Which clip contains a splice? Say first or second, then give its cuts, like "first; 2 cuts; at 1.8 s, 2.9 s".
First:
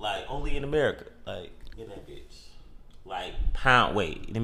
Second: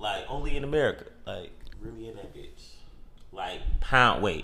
first; 1 cut; at 1.8 s